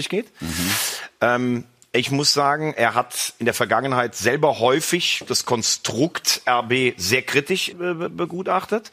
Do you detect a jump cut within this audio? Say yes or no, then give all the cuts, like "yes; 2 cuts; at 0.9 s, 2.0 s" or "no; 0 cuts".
yes; 1 cut; at 7.7 s